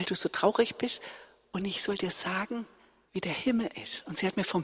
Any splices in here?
yes; 1 cut; at 3.1 s

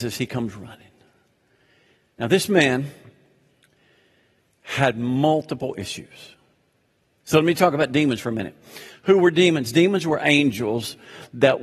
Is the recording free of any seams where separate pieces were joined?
no; 1 cut; at 7.2 s

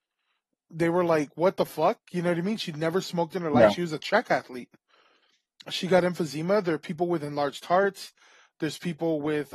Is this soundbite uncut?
yes; 0 cuts

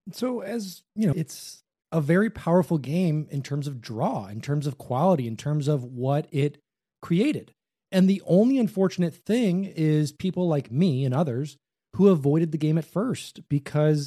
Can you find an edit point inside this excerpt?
yes; 1 cut; at 1.1 s

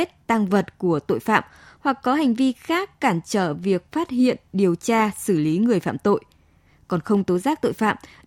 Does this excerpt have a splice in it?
no; 0 cuts

